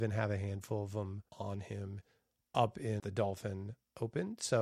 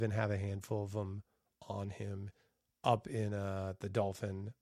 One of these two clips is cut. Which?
first; 2 cuts; at 1.3 s, 3.0 s

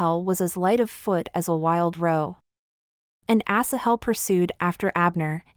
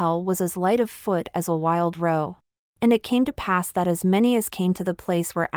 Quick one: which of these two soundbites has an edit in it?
second; 1 cut; at 2.7 s

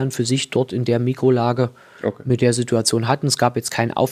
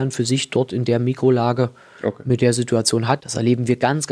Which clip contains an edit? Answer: second; 1 cut; at 3.2 s

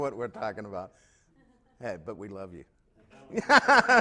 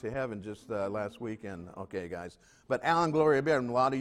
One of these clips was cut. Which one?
first; 1 cut; at 3.1 s

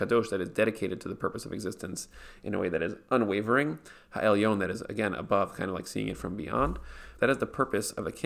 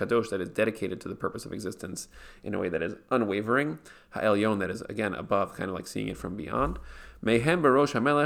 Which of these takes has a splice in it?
first; 1 cut; at 7.2 s

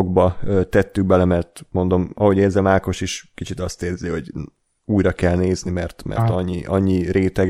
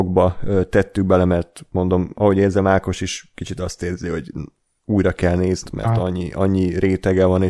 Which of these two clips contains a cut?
second; 1 cut; at 5.6 s

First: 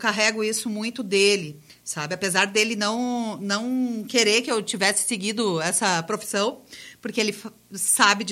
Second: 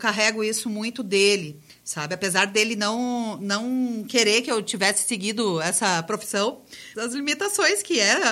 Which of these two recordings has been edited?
second; 1 cut; at 7.0 s

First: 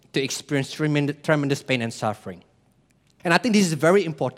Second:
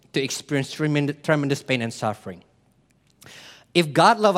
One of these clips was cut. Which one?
first; 1 cut; at 3.2 s

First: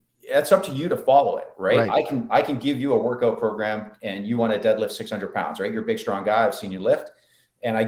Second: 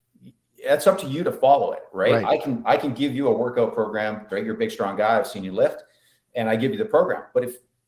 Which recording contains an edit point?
second; 1 cut; at 4.3 s

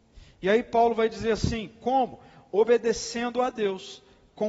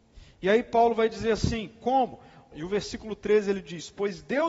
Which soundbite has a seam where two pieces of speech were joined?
second; 1 cut; at 2.5 s

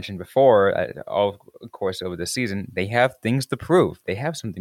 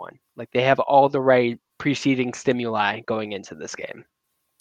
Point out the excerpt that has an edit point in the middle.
second; 1 cut; at 1.7 s

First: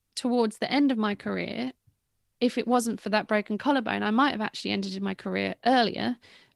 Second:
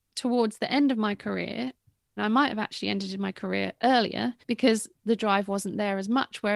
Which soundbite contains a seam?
second; 2 cuts; at 2.2 s, 4.4 s

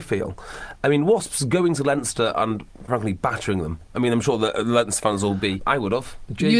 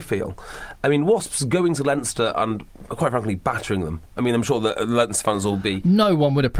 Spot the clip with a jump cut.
first; 2 cuts; at 2.9 s, 5.6 s

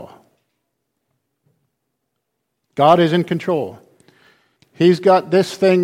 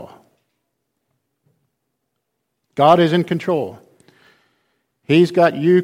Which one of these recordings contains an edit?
first; 1 cut; at 4.6 s

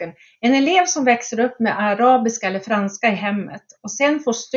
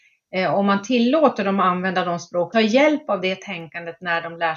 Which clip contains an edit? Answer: second; 1 cut; at 2.5 s

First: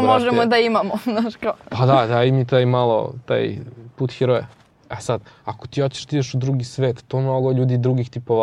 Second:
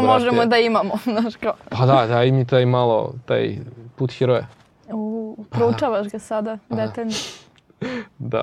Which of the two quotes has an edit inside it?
first; 1 cut; at 4.9 s

